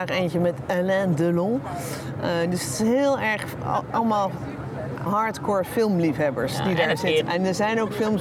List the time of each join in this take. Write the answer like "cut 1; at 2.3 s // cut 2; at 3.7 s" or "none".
cut 1; at 5.1 s // cut 2; at 7.2 s